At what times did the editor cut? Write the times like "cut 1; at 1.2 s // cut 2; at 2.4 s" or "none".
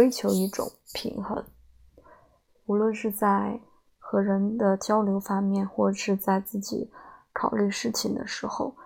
none